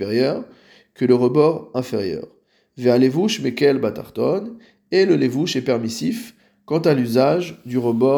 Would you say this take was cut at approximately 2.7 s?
no; 0 cuts

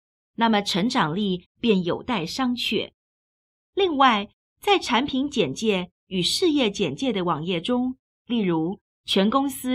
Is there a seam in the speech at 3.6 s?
yes; 2 cuts; at 3.6 s, 8.1 s

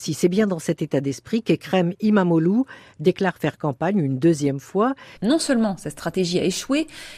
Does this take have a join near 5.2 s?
yes; 1 cut; at 5.2 s

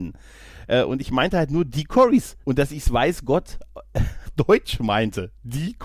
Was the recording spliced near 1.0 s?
no; 2 cuts; at 2.4 s, 4.3 s

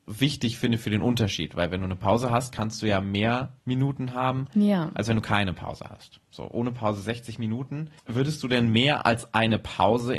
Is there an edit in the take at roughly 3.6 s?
yes; 2 cuts; at 3.6 s, 8.0 s

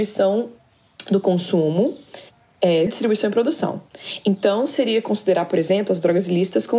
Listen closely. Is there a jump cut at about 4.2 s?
no; 1 cut; at 2.9 s

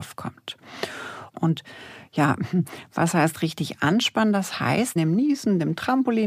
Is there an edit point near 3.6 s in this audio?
no; 2 cuts; at 1.3 s, 5.0 s

